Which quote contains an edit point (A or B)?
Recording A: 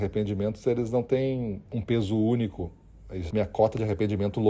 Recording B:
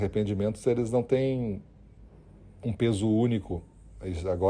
A